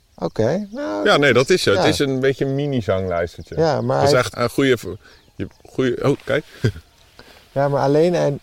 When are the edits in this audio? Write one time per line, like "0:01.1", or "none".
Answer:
0:04.3